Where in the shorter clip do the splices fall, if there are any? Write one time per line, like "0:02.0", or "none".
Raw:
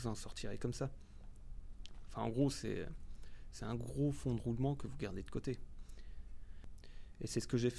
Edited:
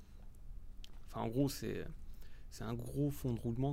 none